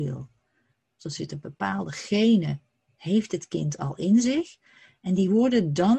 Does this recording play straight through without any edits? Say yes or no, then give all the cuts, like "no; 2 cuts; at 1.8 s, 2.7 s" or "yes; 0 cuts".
no; 1 cut; at 1.0 s